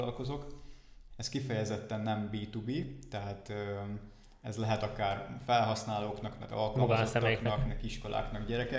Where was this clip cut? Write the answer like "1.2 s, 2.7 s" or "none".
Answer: 1.1 s, 7.7 s